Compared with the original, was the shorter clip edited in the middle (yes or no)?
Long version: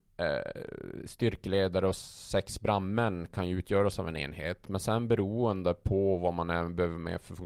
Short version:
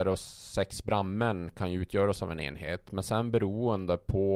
no